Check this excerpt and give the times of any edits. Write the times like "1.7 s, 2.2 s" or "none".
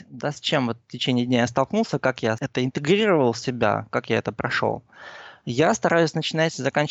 none